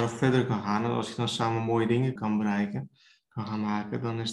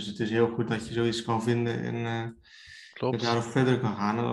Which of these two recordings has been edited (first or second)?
first